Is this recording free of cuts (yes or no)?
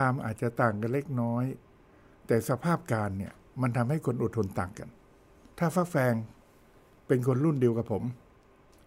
yes